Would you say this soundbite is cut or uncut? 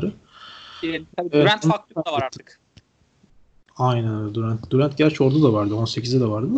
uncut